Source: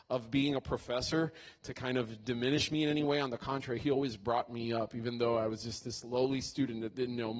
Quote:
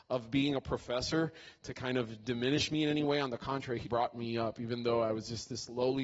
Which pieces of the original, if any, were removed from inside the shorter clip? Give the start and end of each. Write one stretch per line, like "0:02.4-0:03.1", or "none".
0:03.8-0:04.2